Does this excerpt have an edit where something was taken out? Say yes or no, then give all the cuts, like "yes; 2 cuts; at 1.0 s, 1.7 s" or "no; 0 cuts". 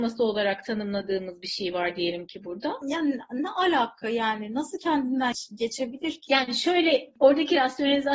yes; 1 cut; at 2.8 s